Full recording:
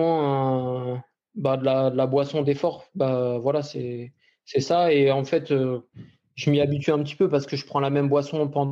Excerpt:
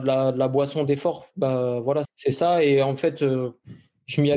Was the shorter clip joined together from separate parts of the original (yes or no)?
yes